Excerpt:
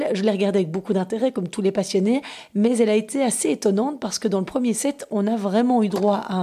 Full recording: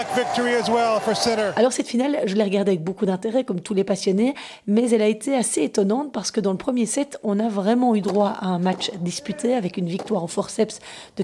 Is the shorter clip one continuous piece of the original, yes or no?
yes